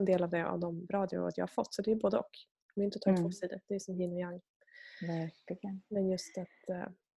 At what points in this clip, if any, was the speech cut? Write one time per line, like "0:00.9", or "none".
none